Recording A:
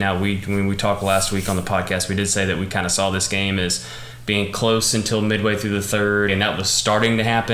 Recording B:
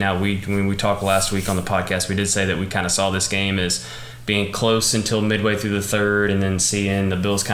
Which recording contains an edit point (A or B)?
A